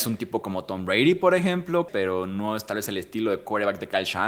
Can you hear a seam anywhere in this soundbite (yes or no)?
yes